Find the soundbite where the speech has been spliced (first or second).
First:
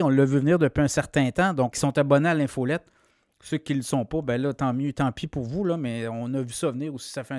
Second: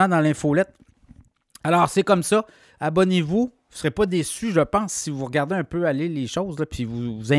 first